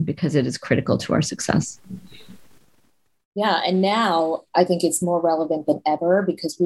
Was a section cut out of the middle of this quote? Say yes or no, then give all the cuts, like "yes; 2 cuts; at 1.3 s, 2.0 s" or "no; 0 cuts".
no; 0 cuts